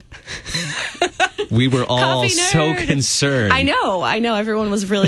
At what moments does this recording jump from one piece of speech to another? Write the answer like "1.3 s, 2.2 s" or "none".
none